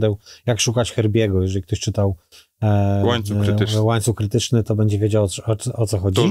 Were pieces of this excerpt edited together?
no; 0 cuts

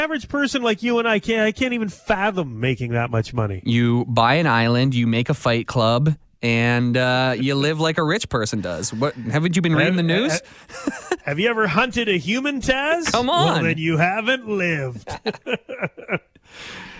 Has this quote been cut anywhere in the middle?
no; 0 cuts

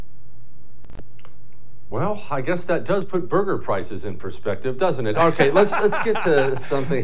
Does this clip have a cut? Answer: no; 0 cuts

